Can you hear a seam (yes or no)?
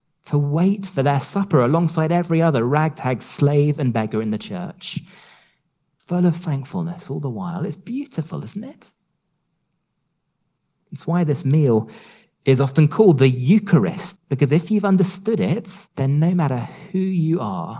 yes